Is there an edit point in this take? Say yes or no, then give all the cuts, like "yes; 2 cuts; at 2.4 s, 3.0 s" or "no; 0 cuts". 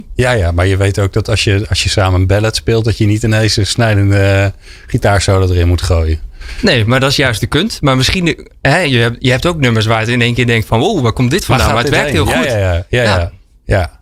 no; 0 cuts